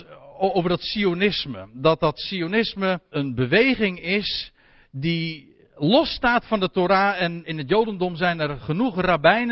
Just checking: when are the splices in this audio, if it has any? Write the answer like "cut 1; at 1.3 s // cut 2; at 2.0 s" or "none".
cut 1; at 3.1 s // cut 2; at 7.4 s